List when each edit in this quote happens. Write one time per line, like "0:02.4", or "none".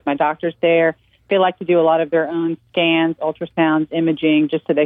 none